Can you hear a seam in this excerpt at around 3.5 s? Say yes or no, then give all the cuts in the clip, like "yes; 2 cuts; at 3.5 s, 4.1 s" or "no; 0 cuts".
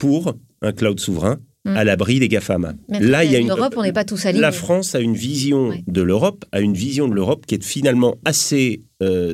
yes; 1 cut; at 3.5 s